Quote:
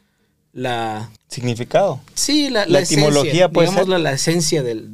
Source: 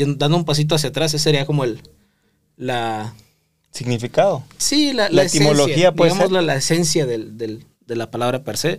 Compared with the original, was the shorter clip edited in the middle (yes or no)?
yes